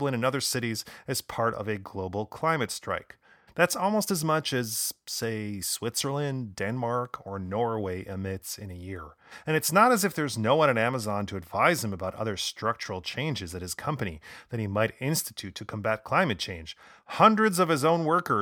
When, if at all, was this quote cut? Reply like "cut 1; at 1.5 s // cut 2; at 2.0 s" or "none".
cut 1; at 3.5 s